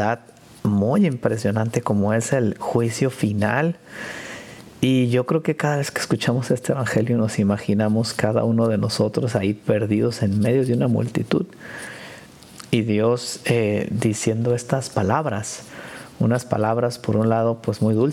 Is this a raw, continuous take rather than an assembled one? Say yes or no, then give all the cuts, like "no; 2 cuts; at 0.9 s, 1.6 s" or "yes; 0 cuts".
yes; 0 cuts